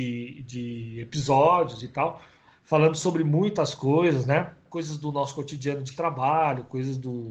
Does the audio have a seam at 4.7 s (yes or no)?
yes